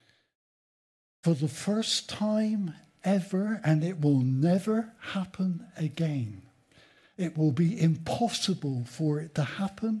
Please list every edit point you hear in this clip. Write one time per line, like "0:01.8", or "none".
none